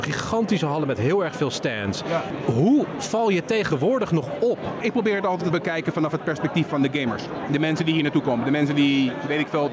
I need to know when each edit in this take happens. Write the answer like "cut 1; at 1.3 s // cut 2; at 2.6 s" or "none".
none